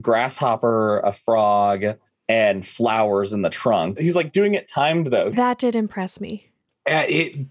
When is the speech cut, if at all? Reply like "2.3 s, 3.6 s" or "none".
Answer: 4.0 s, 5.3 s

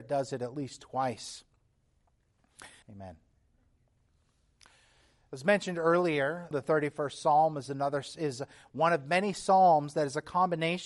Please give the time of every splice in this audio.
2.8 s, 6.5 s

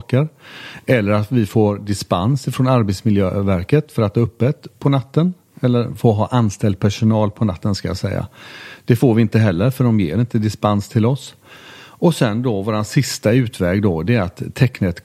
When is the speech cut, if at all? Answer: none

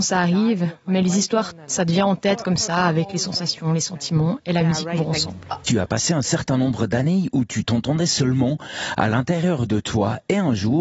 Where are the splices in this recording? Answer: 5.6 s

